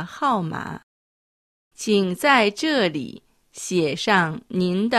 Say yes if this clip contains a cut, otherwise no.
yes